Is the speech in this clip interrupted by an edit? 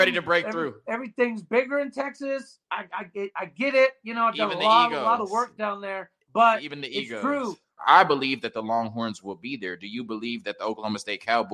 yes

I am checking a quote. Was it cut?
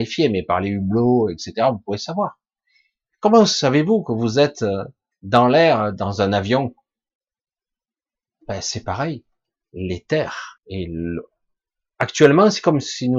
yes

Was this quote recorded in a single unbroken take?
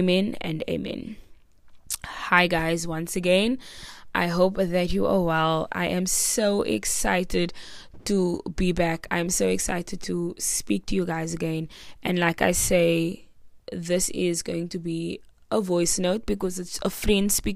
yes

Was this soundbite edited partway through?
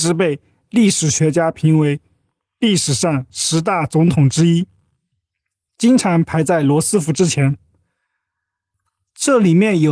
no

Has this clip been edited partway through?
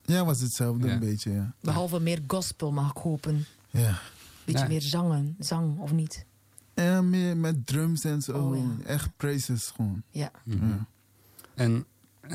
no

